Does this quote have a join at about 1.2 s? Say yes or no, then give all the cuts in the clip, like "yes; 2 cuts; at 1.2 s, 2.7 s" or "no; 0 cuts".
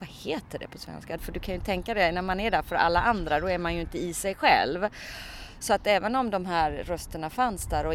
yes; 1 cut; at 1.2 s